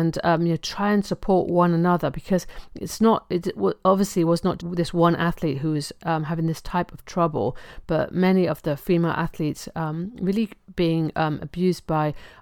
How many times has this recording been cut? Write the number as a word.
one